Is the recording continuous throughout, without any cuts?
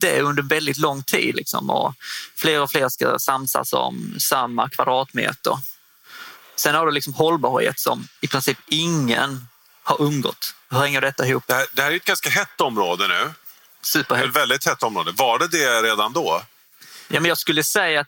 no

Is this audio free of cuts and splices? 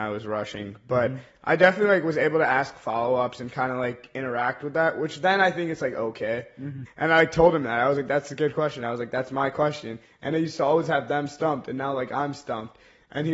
no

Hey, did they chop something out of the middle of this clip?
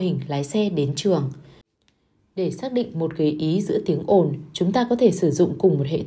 no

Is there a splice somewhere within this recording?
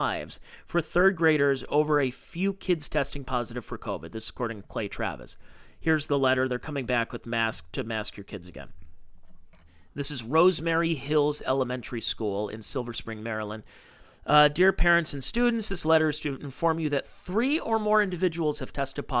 no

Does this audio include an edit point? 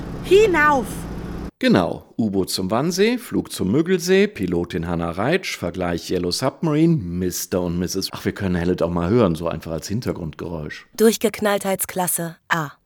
yes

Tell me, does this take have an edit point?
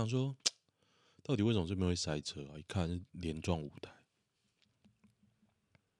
no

